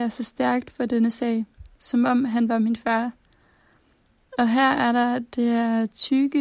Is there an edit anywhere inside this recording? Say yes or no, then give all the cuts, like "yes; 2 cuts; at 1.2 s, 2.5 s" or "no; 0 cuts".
no; 0 cuts